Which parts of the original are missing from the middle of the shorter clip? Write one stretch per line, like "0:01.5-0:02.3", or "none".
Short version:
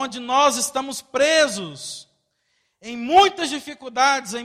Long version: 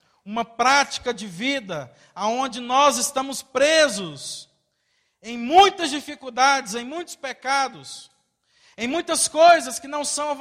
none